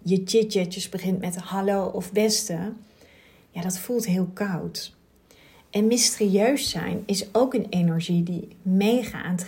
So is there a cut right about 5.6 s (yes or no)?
no